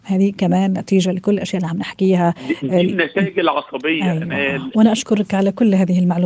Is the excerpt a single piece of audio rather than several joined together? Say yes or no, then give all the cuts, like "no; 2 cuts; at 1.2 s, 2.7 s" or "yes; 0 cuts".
no; 1 cut; at 4.7 s